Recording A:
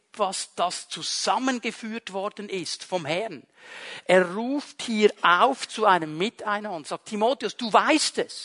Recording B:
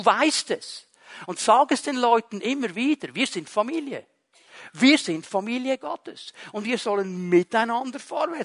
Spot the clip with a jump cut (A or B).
A